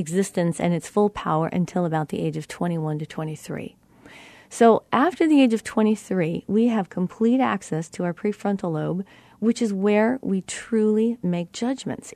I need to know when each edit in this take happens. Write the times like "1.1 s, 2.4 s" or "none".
none

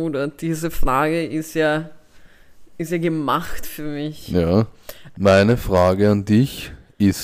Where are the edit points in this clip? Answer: 5.1 s

